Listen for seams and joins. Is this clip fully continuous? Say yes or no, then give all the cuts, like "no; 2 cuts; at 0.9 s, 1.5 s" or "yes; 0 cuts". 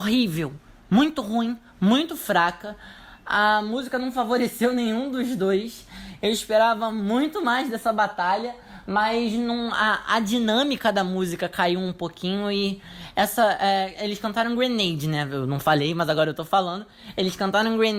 yes; 0 cuts